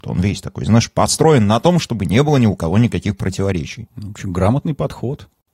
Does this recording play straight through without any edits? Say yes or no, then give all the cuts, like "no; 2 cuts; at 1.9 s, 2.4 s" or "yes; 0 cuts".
yes; 0 cuts